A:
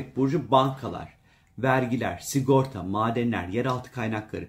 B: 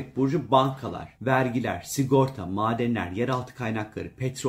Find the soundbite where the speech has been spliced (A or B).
B